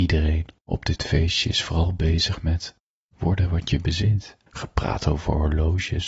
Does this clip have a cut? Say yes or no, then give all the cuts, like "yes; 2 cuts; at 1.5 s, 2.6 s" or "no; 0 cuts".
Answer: yes; 1 cut; at 4.5 s